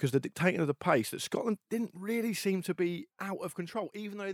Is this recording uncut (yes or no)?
no